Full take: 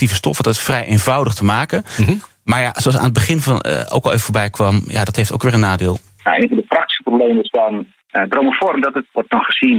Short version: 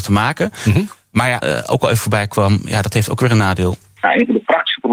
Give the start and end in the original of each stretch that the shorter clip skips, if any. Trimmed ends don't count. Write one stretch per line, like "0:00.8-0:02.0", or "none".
0:02.7-0:03.6